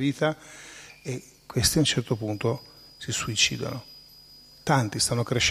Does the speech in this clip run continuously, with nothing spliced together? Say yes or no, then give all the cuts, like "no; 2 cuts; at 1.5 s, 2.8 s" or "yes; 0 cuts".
yes; 0 cuts